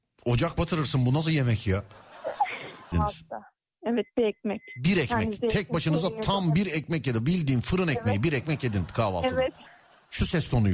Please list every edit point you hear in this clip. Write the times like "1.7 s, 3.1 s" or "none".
2.9 s